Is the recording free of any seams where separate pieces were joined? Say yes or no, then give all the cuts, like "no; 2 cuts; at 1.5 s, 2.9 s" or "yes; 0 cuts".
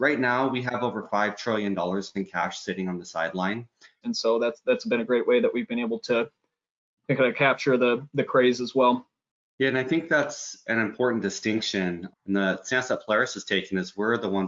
no; 2 cuts; at 4.0 s, 12.1 s